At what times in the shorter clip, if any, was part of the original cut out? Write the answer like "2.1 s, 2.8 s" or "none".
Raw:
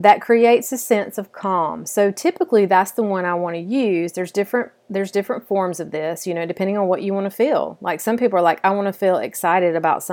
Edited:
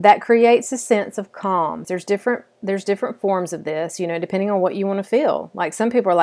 1.8 s